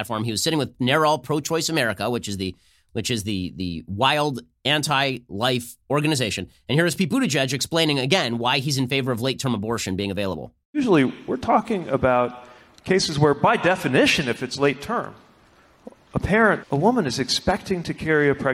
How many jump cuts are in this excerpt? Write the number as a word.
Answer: two